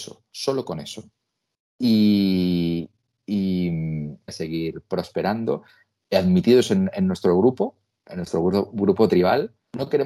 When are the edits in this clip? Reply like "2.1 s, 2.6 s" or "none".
1.7 s, 4.3 s, 6.0 s